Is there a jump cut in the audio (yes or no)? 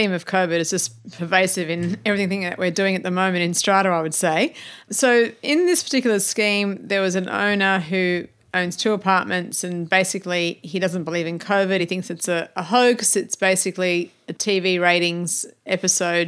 no